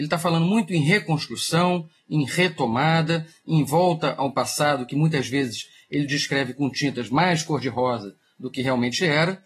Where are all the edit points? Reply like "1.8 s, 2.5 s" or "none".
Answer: none